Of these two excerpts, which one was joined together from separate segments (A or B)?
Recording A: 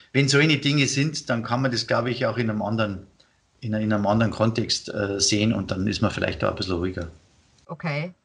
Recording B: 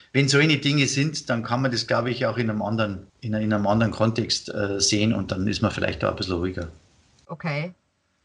B